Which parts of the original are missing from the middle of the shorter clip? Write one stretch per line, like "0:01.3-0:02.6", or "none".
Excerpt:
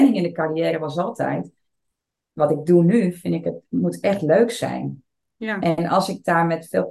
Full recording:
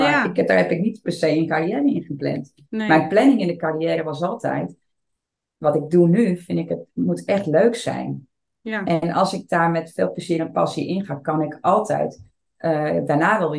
none